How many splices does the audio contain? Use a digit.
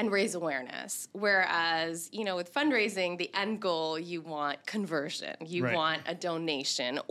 0